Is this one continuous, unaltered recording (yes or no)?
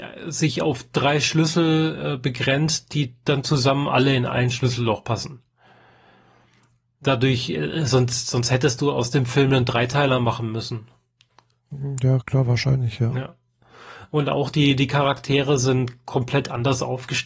yes